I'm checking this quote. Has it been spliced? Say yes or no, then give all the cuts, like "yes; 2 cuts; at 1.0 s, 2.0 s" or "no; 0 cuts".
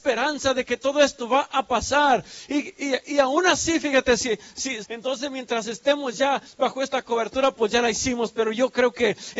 yes; 1 cut; at 4.8 s